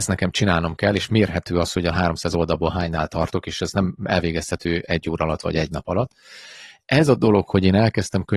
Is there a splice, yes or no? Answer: no